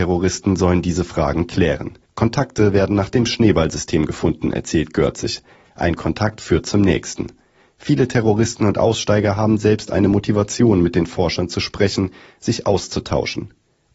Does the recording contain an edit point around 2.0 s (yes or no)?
yes